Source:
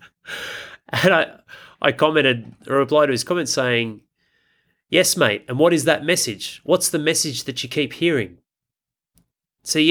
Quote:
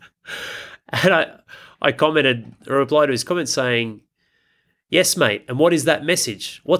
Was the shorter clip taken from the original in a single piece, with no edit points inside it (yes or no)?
yes